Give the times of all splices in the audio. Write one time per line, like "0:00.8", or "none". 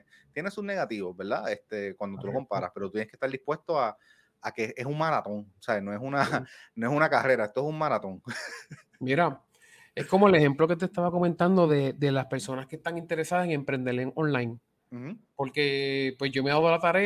none